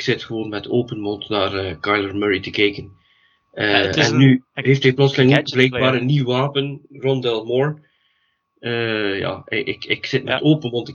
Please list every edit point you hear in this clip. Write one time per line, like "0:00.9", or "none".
none